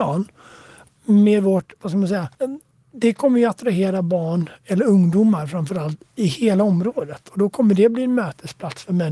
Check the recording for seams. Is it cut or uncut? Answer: cut